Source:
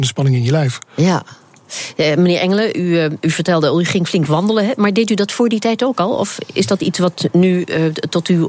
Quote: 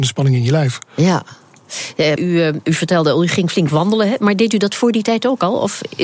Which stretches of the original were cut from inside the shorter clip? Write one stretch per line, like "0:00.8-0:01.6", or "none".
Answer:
0:02.2-0:02.7